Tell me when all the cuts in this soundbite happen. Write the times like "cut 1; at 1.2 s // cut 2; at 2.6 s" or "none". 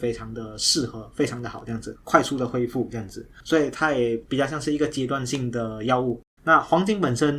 cut 1; at 2.0 s // cut 2; at 3.4 s // cut 3; at 6.4 s